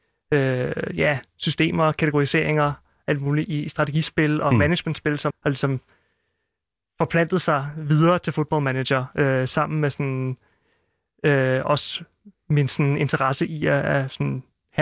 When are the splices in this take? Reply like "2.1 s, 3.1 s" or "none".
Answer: 5.3 s